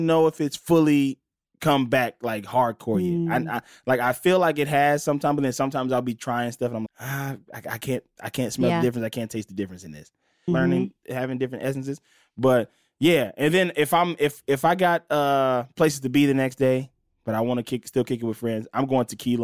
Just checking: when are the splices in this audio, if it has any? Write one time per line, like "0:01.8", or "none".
0:06.9
0:10.5